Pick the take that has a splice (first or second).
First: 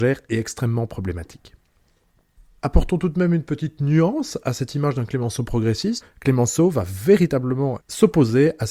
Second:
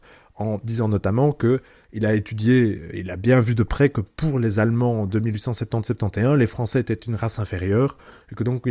first